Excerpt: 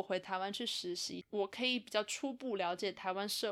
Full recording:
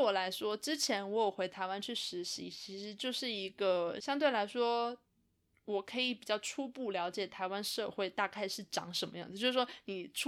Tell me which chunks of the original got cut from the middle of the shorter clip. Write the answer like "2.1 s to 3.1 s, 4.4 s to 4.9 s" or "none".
2.5 s to 5.6 s